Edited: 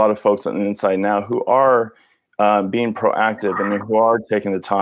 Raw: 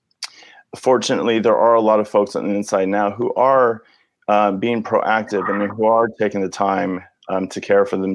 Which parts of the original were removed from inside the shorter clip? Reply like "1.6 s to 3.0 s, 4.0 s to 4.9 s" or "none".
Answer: none